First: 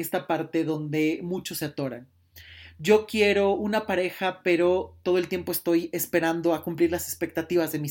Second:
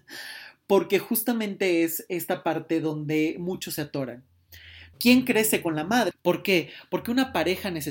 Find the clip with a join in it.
second; 2 cuts; at 4.9 s, 6.1 s

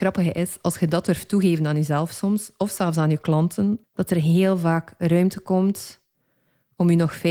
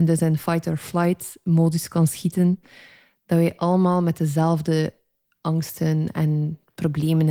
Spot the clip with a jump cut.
first; 1 cut; at 3.8 s

